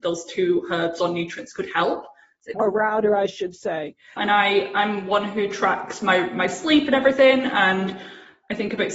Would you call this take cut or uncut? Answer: cut